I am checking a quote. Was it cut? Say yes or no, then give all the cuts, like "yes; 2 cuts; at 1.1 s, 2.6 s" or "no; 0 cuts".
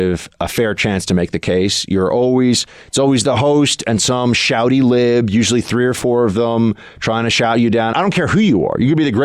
yes; 1 cut; at 7.9 s